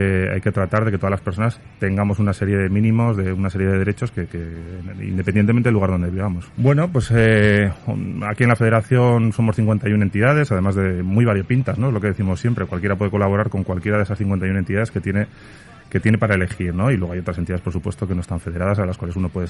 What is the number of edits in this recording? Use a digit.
1